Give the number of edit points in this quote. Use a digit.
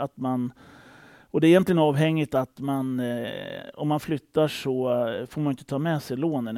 0